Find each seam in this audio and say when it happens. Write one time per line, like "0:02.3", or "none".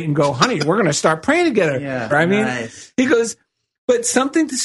0:02.1